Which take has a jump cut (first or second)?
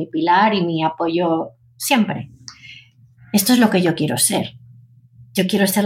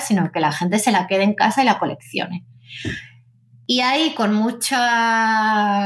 first